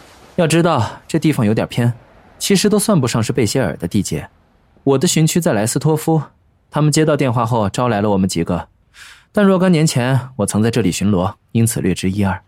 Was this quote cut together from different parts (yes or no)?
yes